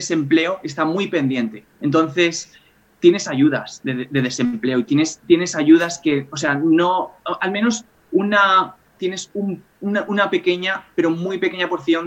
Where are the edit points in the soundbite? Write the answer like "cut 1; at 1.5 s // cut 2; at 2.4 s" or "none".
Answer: cut 1; at 1.7 s // cut 2; at 9.0 s